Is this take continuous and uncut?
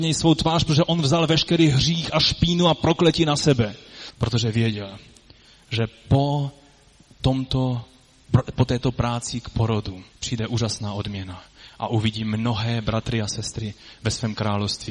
no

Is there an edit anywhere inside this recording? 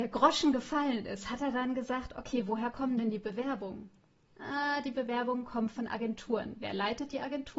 no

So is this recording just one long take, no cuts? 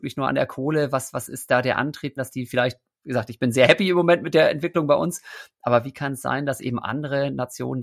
no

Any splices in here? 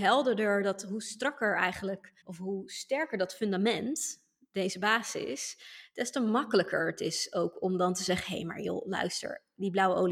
yes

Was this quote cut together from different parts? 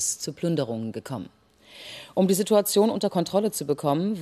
no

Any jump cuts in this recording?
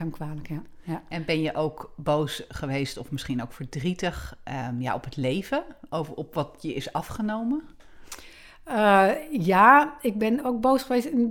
no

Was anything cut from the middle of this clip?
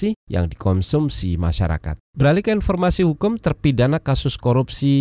yes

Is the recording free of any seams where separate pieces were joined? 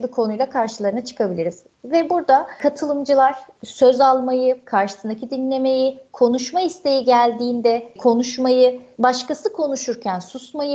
yes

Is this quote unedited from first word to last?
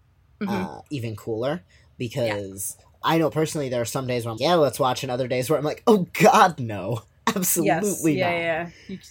no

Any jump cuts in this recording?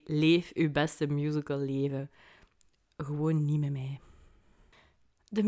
no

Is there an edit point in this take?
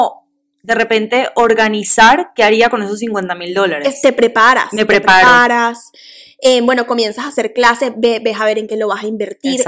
no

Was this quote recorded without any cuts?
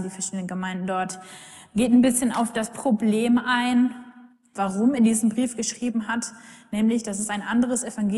no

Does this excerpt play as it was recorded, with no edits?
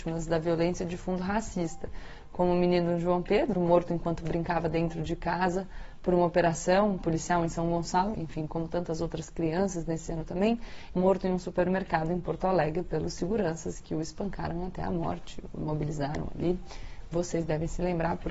no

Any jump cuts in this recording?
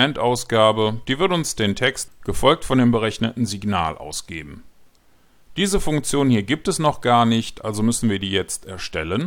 yes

